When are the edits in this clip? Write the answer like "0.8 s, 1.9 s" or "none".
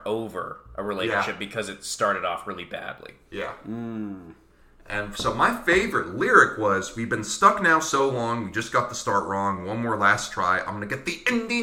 none